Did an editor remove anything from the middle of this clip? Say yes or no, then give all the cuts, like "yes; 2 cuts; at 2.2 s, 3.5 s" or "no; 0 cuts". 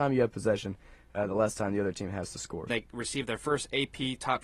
yes; 1 cut; at 2.7 s